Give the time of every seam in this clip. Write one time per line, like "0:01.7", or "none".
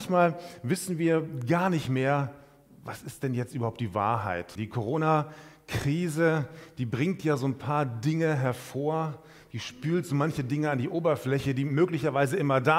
0:04.5